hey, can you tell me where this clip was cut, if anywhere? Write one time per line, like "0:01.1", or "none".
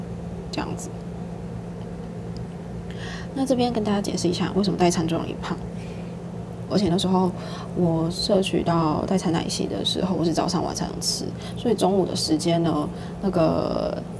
0:06.7